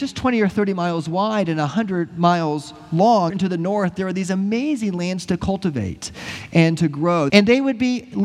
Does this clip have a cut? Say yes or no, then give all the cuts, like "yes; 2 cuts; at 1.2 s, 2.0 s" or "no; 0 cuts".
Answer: yes; 2 cuts; at 3.3 s, 7.3 s